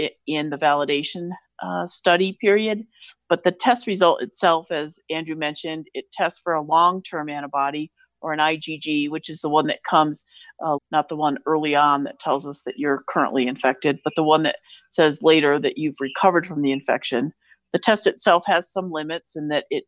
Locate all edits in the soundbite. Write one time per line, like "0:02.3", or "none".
0:10.8